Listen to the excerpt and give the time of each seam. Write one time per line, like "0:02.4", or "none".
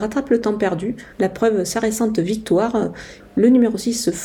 0:01.1
0:03.2